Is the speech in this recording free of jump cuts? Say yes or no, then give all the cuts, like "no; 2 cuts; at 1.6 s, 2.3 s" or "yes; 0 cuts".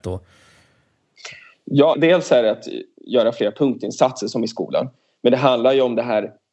no; 1 cut; at 1.9 s